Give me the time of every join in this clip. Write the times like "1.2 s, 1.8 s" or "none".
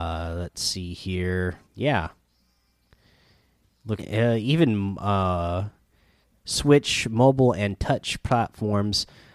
1.6 s, 4.0 s

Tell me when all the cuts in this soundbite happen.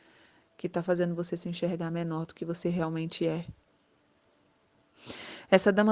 none

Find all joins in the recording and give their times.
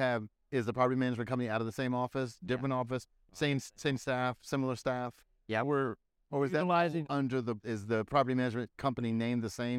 5.6 s, 7.6 s

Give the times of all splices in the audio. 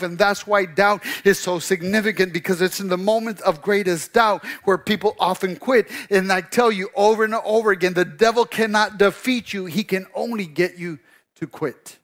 none

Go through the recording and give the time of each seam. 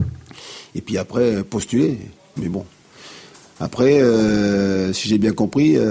2.4 s

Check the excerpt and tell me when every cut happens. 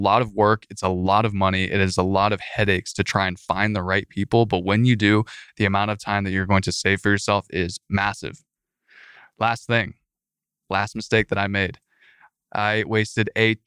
none

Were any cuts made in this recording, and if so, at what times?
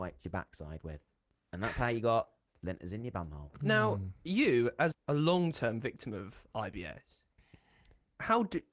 4.9 s

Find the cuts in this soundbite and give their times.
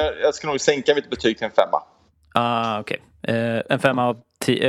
none

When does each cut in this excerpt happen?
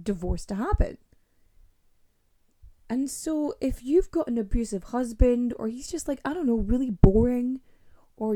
2.7 s

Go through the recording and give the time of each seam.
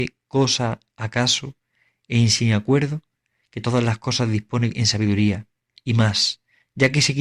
5.7 s

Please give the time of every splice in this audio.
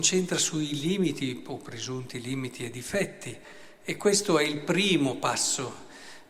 none

